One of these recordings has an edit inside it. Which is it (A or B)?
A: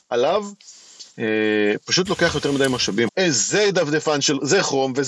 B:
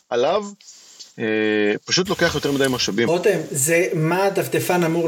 A